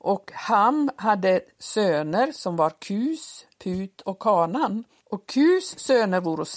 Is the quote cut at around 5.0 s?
yes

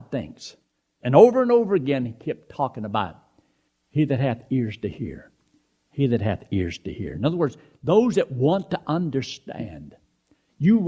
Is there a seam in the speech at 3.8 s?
no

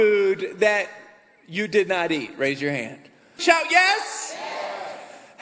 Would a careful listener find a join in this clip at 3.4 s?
yes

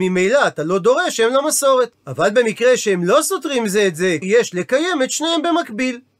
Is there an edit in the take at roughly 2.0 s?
yes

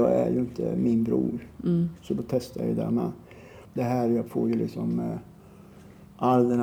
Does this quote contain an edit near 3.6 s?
yes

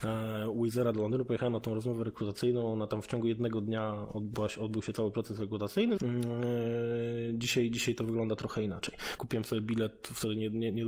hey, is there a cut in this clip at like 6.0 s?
yes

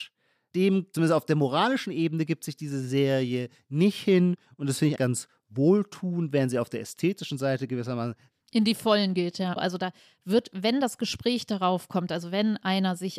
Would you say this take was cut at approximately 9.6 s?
yes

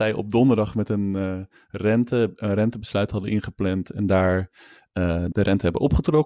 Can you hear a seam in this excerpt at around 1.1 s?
no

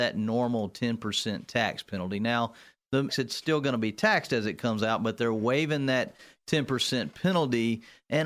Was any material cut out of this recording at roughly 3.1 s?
yes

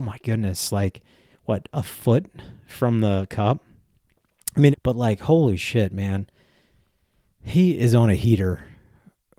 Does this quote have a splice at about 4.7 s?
yes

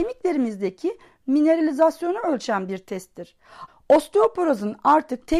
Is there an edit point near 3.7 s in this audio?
yes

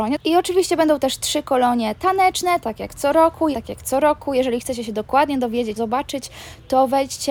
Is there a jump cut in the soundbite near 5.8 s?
yes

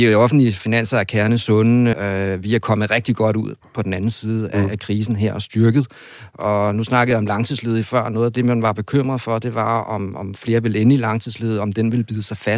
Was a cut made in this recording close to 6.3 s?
no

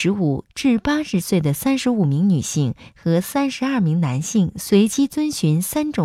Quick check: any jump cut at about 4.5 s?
no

